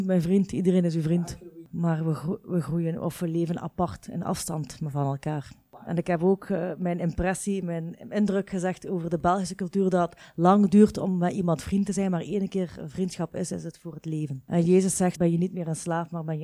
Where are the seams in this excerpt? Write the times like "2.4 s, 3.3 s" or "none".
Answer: 15.2 s